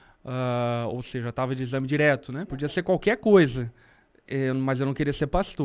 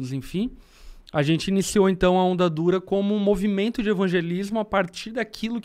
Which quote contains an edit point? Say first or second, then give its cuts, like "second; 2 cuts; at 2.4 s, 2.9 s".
first; 1 cut; at 2.4 s